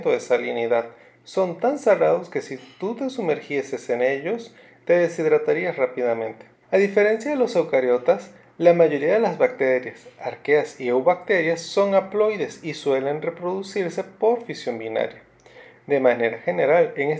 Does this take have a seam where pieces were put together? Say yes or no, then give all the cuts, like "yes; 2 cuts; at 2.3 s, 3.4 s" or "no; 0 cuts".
yes; 1 cut; at 6.6 s